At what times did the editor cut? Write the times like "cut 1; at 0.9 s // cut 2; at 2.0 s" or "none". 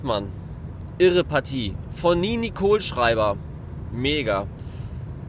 none